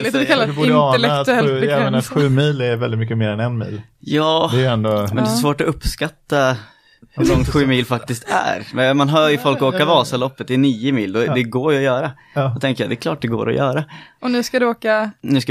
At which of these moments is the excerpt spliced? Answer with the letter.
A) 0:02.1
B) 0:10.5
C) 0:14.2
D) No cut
C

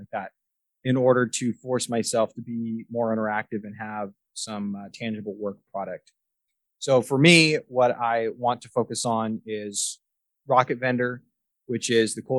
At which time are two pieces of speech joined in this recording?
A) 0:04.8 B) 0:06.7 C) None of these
B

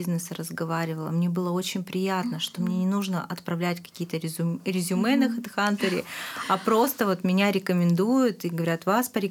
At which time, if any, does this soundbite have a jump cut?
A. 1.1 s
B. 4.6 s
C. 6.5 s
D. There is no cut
D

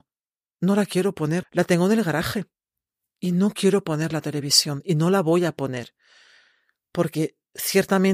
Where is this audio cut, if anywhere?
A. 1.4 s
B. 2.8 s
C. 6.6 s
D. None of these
A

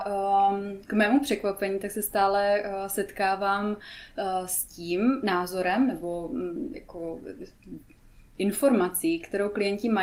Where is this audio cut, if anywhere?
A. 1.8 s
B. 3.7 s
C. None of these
C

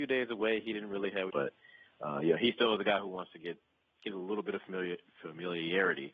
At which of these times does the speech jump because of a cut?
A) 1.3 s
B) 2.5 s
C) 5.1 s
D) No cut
A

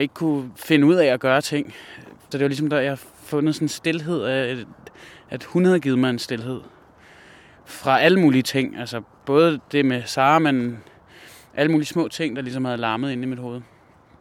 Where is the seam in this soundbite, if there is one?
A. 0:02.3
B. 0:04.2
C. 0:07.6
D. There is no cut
A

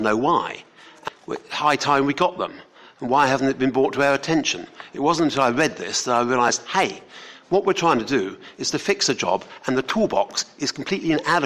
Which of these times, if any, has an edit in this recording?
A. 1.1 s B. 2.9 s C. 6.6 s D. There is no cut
A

